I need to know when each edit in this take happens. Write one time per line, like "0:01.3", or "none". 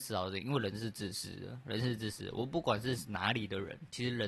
none